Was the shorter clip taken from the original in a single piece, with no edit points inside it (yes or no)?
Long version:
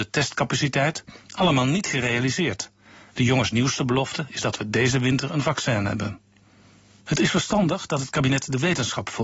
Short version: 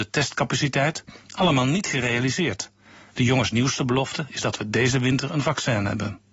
yes